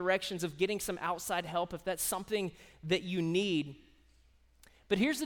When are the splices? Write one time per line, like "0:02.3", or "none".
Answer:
none